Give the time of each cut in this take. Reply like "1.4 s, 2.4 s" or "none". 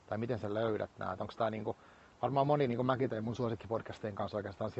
none